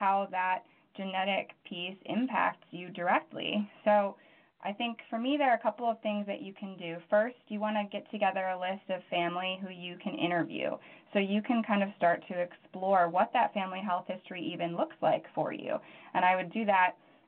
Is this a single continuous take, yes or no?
yes